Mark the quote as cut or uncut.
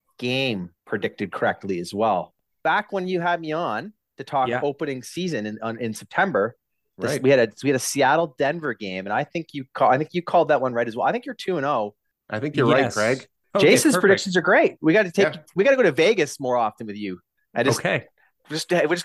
uncut